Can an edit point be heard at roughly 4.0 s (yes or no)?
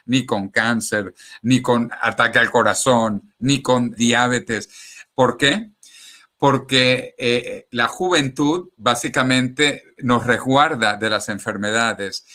yes